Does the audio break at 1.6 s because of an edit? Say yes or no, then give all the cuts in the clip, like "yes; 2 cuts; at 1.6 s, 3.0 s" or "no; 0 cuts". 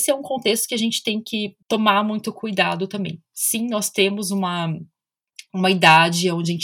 yes; 1 cut; at 1.6 s